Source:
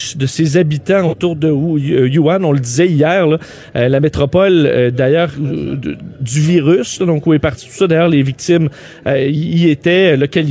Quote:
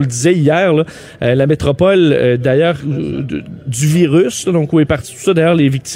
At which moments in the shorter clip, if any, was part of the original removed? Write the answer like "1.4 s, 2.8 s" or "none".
none